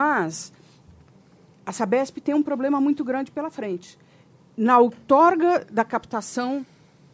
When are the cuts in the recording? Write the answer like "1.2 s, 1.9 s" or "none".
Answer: none